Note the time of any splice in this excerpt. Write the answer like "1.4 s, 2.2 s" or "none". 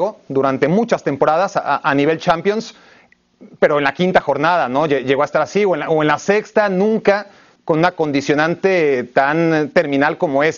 none